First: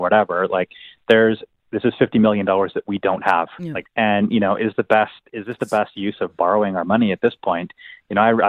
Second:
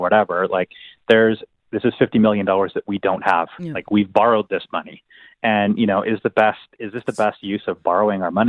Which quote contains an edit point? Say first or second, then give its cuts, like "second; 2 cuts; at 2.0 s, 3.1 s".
first; 1 cut; at 3.9 s